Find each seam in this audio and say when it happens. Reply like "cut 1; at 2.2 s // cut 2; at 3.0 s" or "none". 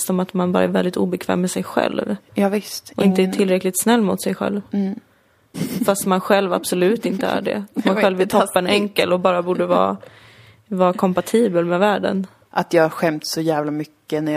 cut 1; at 5.5 s // cut 2; at 12.4 s